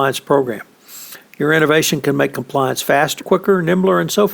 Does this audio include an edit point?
yes; 1 cut; at 3.2 s

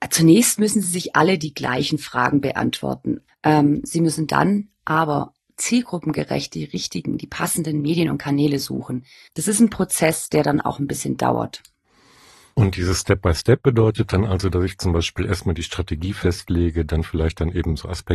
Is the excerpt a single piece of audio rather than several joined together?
no; 2 cuts; at 3.3 s, 9.3 s

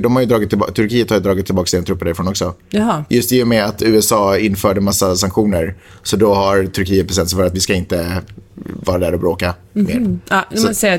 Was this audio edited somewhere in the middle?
no; 0 cuts

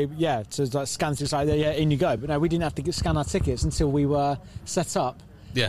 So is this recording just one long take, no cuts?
yes; 0 cuts

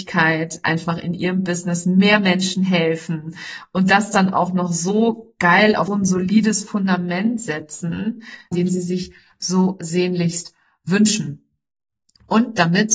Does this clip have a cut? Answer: yes; 2 cuts; at 5.9 s, 8.5 s

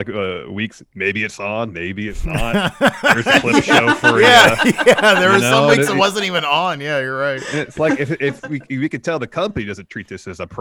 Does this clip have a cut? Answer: no; 0 cuts

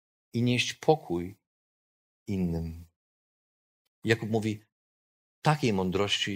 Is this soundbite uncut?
no; 1 cut; at 3.9 s

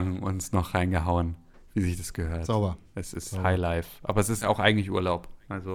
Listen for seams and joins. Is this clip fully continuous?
yes; 0 cuts

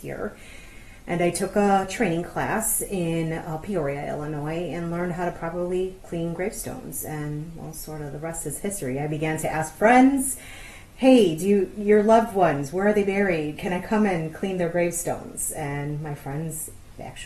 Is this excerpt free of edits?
yes; 0 cuts

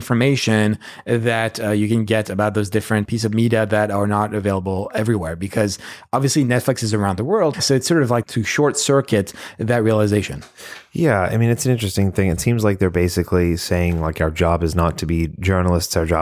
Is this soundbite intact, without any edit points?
no; 1 cut; at 7.5 s

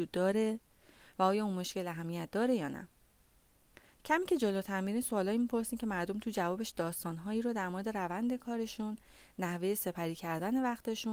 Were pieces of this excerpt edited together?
no; 0 cuts

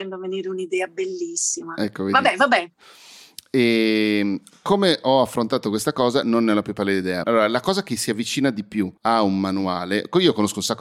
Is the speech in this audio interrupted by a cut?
yes; 2 cuts; at 7.2 s, 9.0 s

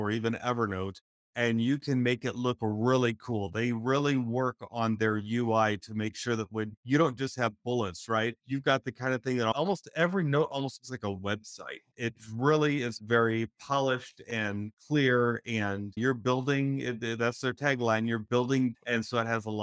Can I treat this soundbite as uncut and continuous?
yes; 0 cuts

